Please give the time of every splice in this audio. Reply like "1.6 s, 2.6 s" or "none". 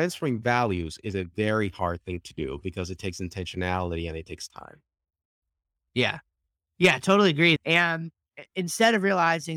7.6 s